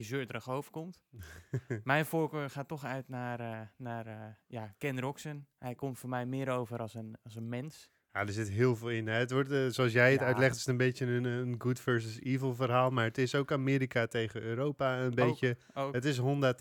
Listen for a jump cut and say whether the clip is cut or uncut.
uncut